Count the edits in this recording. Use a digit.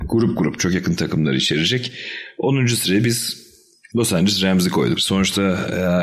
1